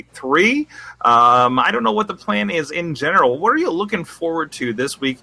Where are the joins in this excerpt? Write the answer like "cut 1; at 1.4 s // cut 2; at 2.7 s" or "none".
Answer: none